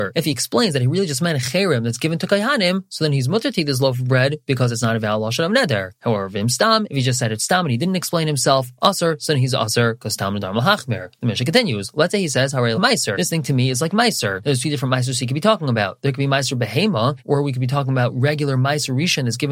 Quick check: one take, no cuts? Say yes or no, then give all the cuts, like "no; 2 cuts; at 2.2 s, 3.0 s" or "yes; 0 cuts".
no; 2 cuts; at 12.7 s, 17.2 s